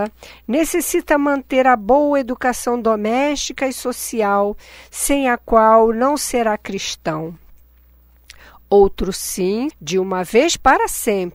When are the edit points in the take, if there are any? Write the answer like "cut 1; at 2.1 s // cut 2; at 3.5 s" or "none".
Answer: cut 1; at 9.7 s